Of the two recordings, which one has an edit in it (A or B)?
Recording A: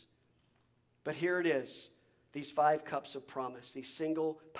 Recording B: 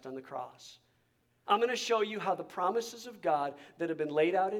B